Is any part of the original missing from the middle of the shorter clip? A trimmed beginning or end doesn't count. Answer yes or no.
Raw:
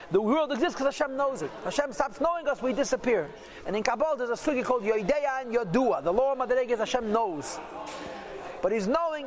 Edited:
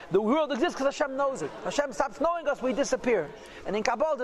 no